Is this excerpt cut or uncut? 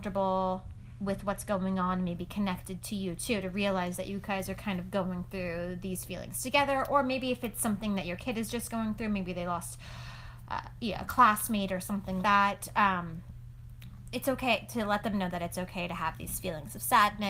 cut